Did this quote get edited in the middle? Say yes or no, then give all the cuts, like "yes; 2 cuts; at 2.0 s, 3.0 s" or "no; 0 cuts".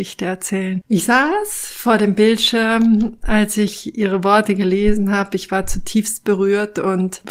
no; 0 cuts